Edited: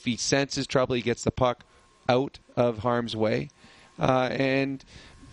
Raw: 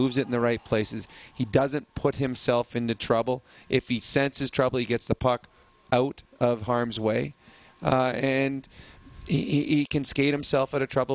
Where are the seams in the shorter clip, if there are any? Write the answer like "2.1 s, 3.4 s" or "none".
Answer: none